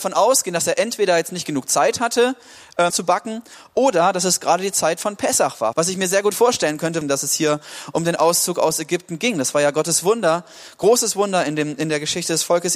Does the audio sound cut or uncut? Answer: cut